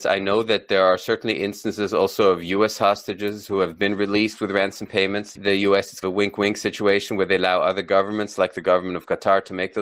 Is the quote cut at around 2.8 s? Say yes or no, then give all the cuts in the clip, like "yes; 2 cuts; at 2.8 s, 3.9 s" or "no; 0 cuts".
no; 1 cut; at 5.4 s